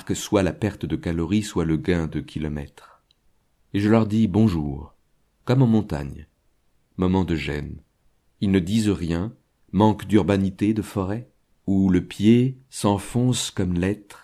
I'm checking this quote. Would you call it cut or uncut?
cut